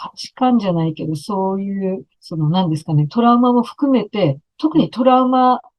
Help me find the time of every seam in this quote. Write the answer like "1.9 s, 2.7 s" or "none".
2.1 s